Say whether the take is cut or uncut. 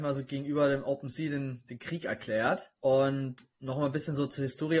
cut